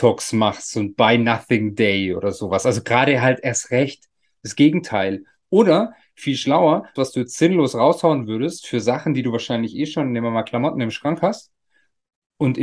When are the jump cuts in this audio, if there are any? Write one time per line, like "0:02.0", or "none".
0:07.0